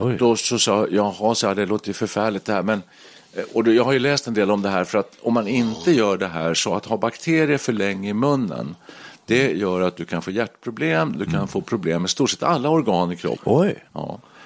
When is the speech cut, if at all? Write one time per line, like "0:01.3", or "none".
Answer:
0:11.1
0:13.4